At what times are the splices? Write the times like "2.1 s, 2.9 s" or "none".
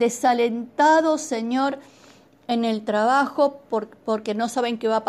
none